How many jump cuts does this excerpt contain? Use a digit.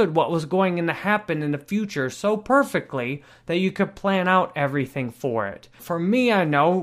1